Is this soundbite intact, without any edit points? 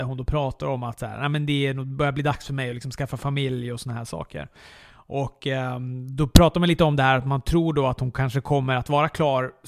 yes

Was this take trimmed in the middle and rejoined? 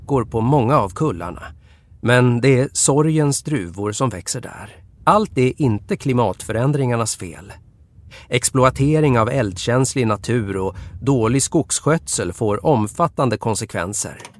yes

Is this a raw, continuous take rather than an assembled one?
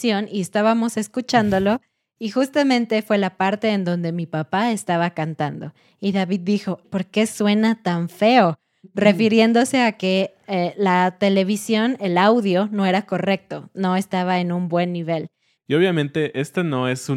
no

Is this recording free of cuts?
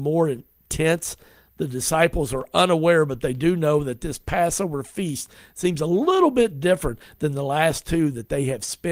yes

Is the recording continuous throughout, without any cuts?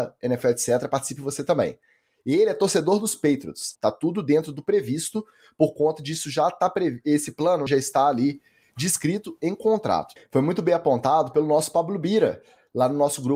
no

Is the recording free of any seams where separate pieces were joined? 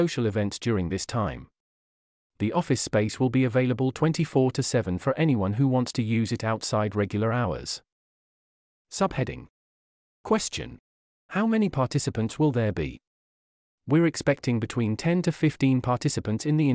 yes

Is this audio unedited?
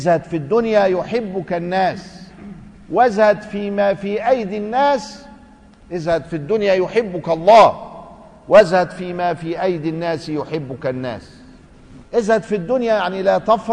no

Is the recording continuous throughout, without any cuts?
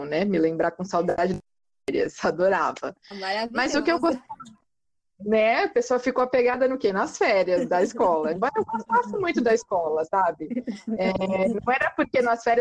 yes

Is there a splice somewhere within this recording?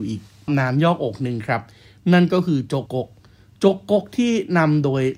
yes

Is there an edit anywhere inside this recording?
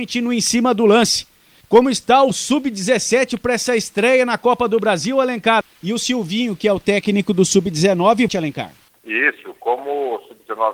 yes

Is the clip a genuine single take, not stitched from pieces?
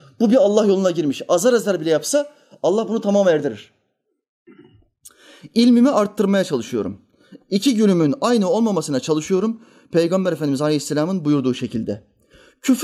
yes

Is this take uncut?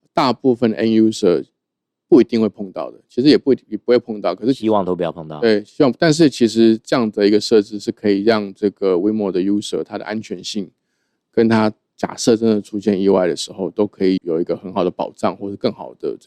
no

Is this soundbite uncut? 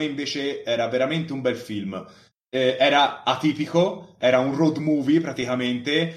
yes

